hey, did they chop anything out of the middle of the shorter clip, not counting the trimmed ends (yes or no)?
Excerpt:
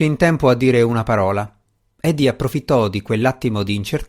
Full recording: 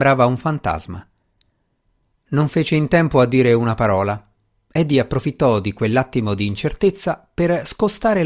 no